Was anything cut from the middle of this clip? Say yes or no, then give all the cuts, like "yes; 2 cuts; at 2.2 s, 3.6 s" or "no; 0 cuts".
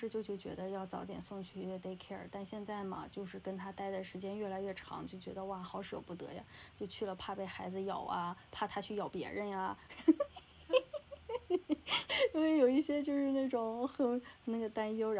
no; 0 cuts